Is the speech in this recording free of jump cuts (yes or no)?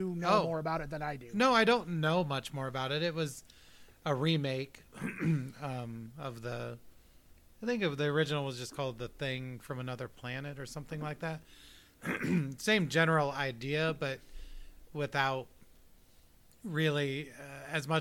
yes